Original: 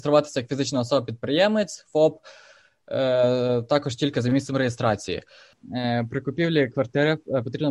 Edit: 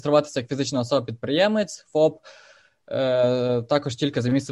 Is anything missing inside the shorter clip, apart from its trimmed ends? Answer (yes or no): no